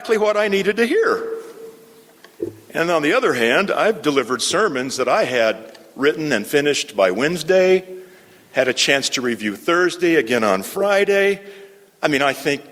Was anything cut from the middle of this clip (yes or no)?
no